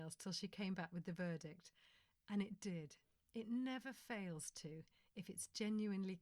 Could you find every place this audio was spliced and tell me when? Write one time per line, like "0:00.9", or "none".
none

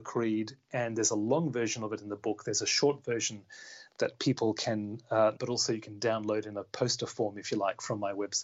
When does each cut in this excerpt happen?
0:05.3

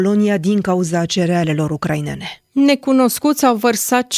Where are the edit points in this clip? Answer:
0:02.5

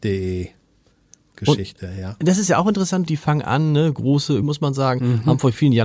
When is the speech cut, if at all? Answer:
0:03.1
0:04.4

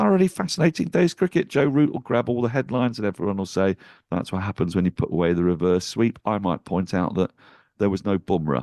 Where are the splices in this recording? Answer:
none

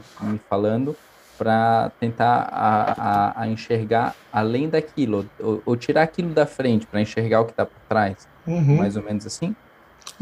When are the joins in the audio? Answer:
0:02.9

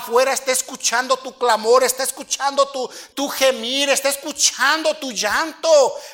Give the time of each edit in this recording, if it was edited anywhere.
0:03.1

